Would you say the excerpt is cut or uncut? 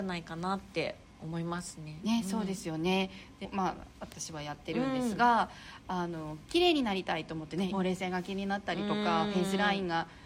cut